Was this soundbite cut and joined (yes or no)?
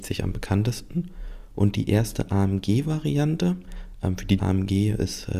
yes